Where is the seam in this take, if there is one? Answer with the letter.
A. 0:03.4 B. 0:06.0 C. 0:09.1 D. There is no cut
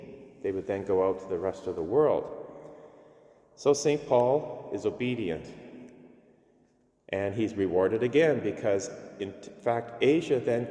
D